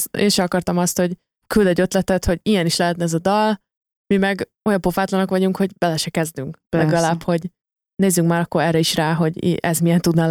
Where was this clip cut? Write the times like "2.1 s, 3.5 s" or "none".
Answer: none